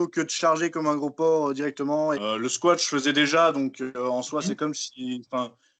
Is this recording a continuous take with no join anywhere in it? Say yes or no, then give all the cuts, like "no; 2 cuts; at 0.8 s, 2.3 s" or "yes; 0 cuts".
no; 1 cut; at 2.1 s